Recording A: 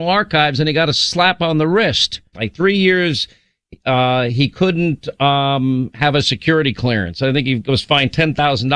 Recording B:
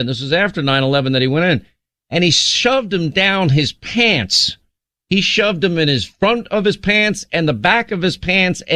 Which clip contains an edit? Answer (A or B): A